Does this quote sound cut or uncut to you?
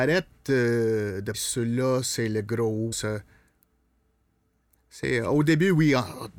cut